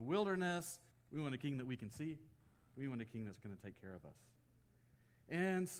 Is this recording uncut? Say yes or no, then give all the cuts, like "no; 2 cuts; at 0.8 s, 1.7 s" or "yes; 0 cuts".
no; 1 cut; at 0.9 s